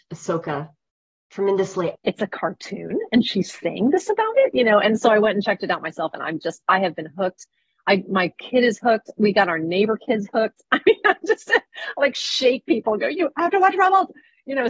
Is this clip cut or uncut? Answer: cut